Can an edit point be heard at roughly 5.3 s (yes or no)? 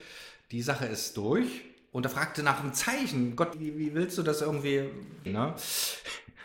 yes